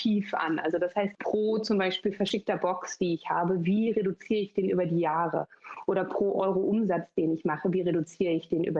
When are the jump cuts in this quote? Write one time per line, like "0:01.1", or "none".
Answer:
0:01.1